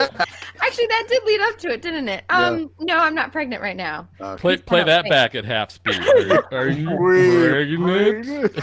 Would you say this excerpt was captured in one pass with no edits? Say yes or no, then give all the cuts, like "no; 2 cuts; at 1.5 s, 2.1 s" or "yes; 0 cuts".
yes; 0 cuts